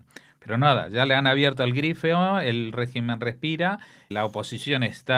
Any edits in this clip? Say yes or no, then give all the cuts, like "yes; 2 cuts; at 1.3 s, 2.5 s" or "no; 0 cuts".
yes; 1 cut; at 4.1 s